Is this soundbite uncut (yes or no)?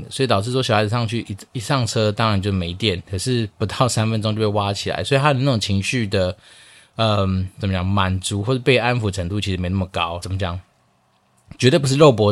no